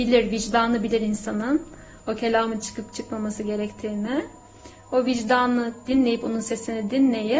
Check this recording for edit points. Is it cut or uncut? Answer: uncut